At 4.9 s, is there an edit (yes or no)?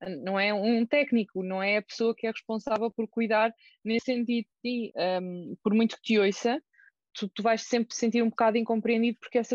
yes